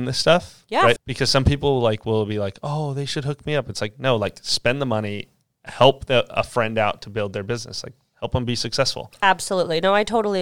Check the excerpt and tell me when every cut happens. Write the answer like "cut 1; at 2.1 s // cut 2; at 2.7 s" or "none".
cut 1; at 1.0 s